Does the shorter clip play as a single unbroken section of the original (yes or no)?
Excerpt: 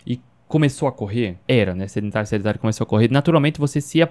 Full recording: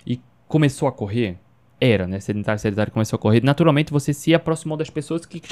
no